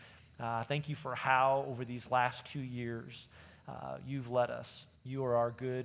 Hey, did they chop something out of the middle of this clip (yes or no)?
yes